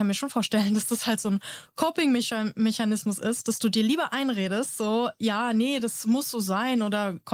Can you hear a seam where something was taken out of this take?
no; 0 cuts

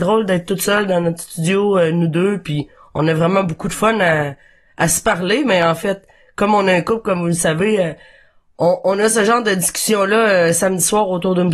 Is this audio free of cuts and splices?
yes; 0 cuts

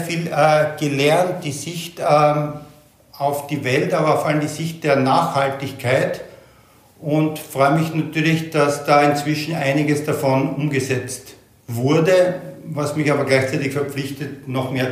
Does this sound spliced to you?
no; 0 cuts

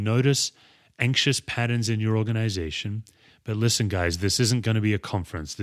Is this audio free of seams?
no; 1 cut; at 3.3 s

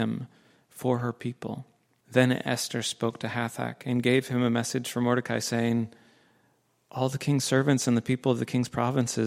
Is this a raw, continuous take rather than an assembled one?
no; 1 cut; at 2.0 s

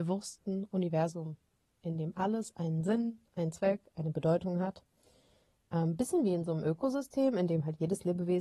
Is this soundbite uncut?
yes; 0 cuts

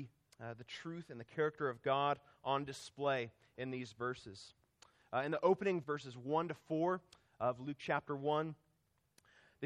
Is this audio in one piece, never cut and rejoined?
no; 1 cut; at 5.8 s

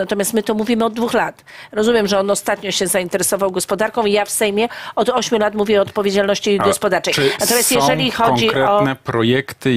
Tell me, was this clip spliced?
no; 0 cuts

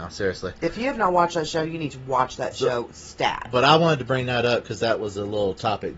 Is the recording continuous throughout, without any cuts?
yes; 0 cuts

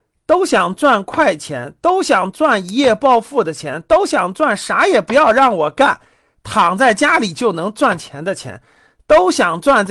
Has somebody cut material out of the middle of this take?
no; 0 cuts

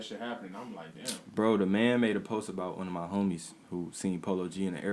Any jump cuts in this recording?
no; 0 cuts

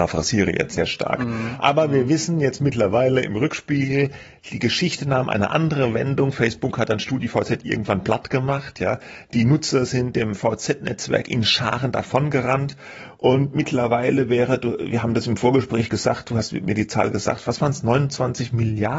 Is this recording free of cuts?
yes; 0 cuts

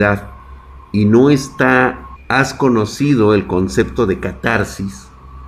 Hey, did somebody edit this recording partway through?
yes; 1 cut; at 2.2 s

